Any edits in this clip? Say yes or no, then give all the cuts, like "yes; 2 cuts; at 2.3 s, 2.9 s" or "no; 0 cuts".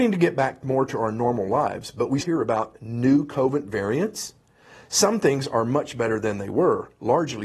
yes; 1 cut; at 2.2 s